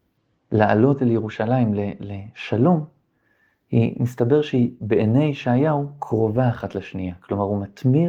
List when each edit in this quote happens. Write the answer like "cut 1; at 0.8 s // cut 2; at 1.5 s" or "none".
none